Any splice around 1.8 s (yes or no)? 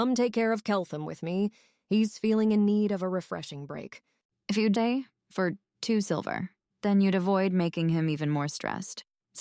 no